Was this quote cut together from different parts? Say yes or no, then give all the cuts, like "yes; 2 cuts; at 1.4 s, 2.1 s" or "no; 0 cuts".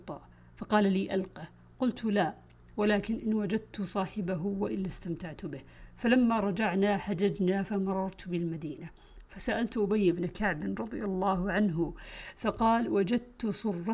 no; 0 cuts